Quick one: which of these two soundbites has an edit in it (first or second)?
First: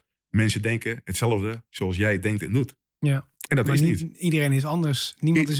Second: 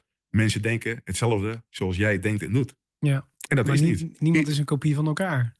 second